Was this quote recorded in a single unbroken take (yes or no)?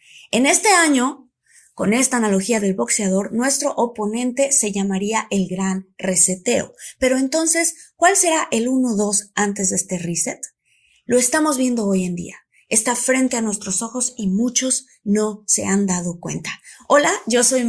yes